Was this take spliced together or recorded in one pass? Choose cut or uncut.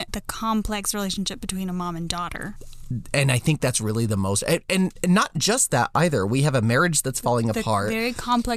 uncut